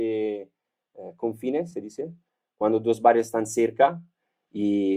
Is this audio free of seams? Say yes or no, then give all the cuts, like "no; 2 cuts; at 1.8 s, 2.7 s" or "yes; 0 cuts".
yes; 0 cuts